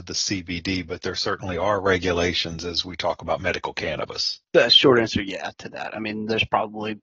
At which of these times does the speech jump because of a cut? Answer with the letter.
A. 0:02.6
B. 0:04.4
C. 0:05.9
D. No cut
B